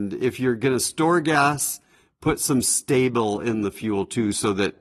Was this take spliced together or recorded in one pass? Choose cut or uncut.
uncut